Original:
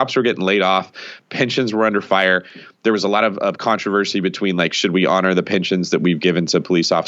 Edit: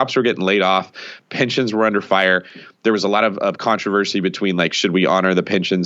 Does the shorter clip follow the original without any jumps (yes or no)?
yes